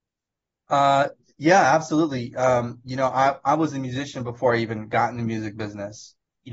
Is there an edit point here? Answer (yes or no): no